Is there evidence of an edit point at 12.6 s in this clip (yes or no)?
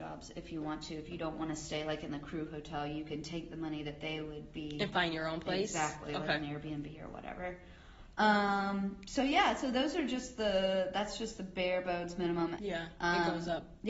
yes